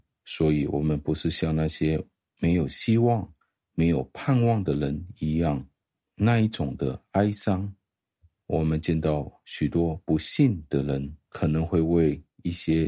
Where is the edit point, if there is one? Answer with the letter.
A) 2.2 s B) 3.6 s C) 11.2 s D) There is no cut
C